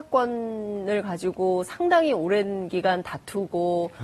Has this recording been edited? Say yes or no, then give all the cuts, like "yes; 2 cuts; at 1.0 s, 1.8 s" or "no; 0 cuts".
no; 0 cuts